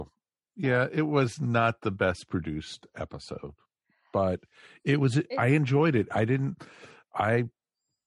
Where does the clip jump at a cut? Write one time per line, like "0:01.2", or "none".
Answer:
none